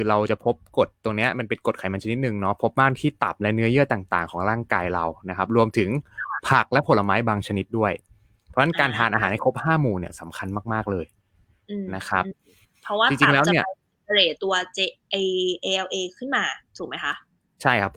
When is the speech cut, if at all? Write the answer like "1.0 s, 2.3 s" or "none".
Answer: 14.4 s, 16.7 s